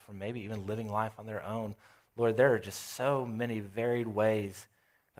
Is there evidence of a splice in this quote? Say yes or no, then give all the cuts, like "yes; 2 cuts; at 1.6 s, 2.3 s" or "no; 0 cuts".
no; 0 cuts